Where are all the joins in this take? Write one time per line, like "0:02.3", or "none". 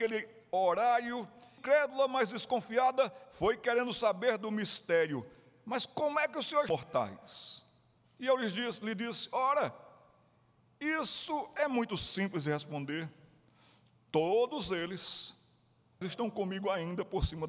0:16.0